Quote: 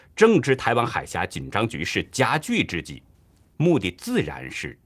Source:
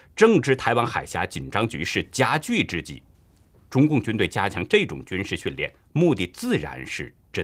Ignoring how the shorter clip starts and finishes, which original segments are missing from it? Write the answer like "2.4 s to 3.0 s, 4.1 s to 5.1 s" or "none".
3.5 s to 5.9 s